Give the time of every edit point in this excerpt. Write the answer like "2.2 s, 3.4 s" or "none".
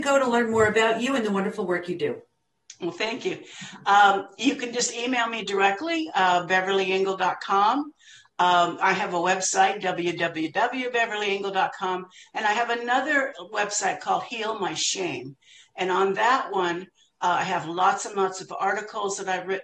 none